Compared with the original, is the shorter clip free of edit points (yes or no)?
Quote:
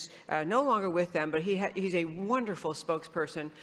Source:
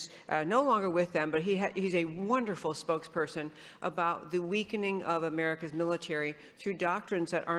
yes